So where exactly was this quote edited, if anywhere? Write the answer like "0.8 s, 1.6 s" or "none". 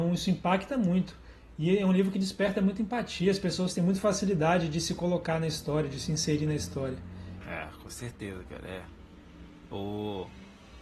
7.4 s